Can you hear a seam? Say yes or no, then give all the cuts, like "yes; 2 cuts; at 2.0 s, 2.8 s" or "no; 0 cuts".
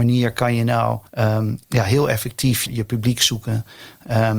yes; 2 cuts; at 1.1 s, 2.7 s